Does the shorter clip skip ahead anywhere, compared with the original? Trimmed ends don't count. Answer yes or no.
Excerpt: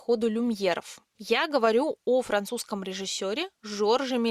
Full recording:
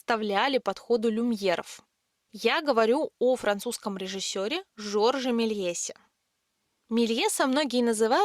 yes